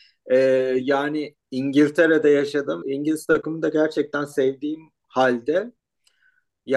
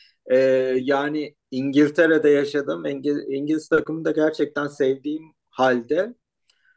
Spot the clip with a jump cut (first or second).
first